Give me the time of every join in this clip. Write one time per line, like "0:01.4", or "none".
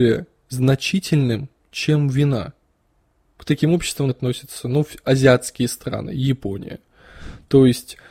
0:04.1